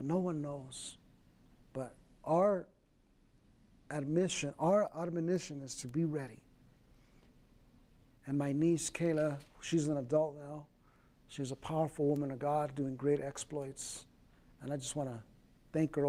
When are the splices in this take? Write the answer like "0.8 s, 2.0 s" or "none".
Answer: 8.1 s

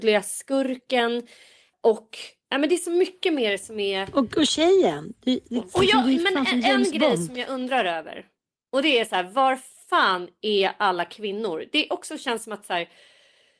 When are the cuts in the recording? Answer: none

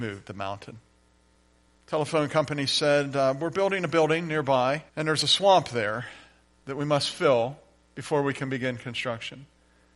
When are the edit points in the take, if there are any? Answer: 1.8 s, 4.9 s

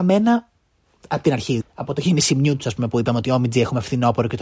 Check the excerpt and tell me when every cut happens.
1.6 s

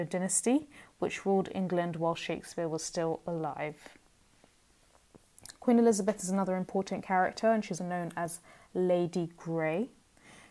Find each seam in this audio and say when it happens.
7.8 s

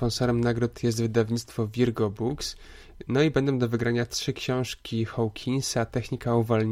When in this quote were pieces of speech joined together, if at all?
none

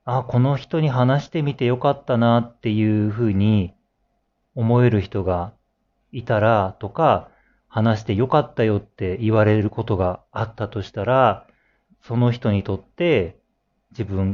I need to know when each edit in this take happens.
11.9 s

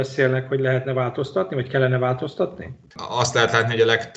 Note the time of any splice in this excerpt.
2.9 s

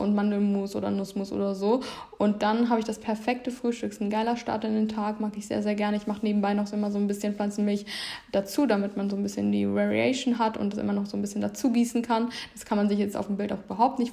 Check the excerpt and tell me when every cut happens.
none

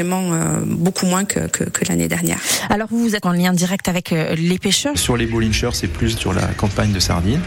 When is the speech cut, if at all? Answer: 3.2 s, 4.9 s

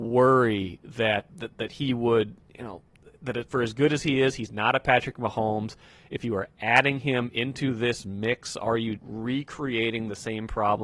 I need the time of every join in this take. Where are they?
1.3 s, 9.0 s

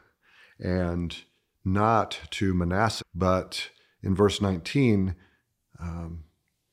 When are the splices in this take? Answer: 3.0 s

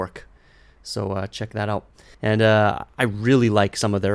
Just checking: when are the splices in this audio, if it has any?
2.1 s

